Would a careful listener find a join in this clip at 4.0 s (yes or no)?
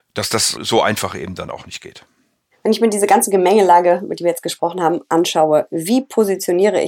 no